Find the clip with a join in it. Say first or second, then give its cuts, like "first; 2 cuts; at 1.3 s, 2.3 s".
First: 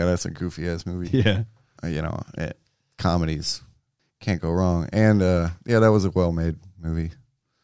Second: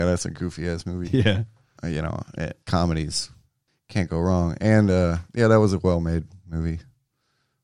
second; 1 cut; at 2.6 s